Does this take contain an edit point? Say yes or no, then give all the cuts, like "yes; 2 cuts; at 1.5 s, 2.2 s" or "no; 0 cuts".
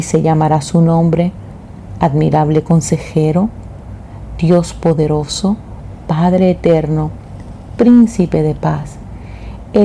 no; 0 cuts